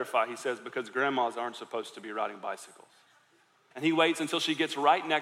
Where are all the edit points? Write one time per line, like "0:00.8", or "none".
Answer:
0:03.7